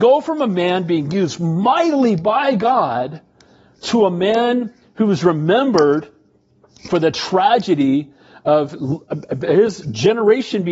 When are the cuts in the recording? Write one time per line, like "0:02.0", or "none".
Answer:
none

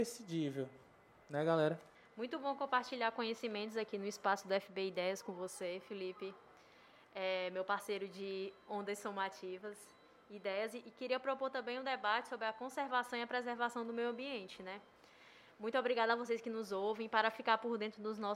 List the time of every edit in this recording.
none

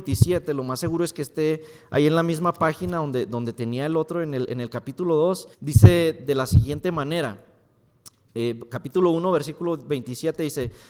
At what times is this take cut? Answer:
0:05.5

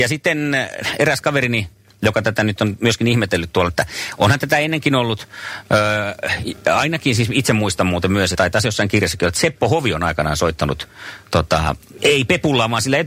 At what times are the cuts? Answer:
0:03.7
0:08.3
0:12.0

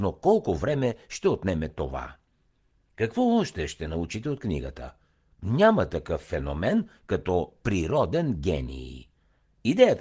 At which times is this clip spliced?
none

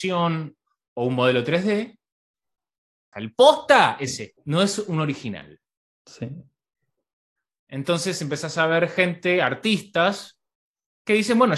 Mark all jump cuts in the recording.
0:03.1
0:04.4

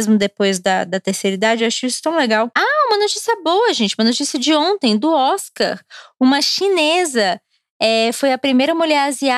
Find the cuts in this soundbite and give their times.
none

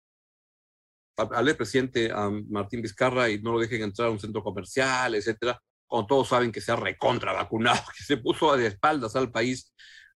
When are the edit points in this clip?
0:01.2

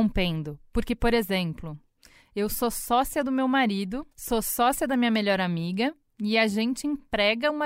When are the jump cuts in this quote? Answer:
0:04.1

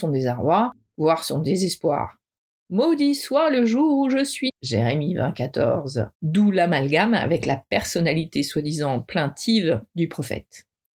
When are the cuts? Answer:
0:04.5
0:06.1

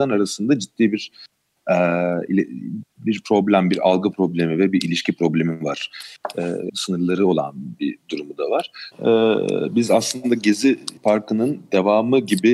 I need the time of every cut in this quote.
0:06.7
0:08.9
0:11.0

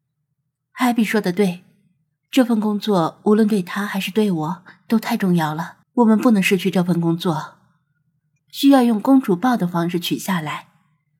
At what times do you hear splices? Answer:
0:05.8
0:08.4

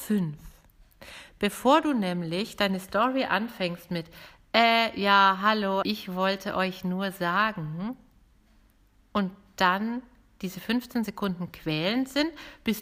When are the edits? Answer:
0:05.8

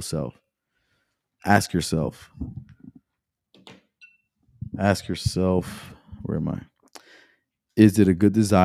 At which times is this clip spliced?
0:01.4

